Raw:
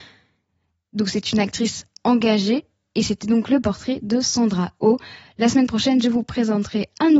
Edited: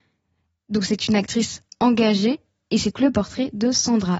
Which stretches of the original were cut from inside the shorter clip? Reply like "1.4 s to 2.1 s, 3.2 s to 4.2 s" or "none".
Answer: 3.2 s to 3.4 s